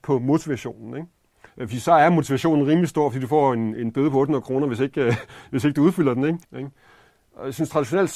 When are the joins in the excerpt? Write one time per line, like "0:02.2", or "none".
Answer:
0:01.5
0:06.4